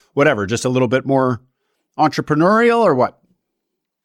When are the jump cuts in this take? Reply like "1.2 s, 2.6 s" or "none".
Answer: none